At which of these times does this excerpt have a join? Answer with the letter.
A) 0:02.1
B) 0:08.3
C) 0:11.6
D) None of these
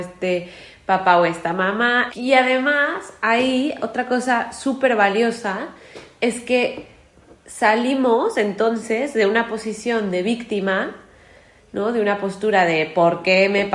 A